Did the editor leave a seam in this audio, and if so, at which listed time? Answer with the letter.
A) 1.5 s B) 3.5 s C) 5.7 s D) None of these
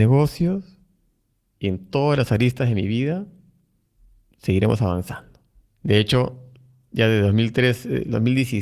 C